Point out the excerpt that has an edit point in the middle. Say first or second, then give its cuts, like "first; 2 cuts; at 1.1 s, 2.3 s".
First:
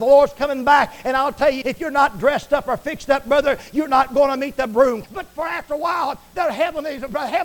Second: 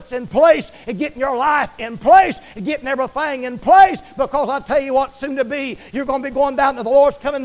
first; 2 cuts; at 1.6 s, 5.0 s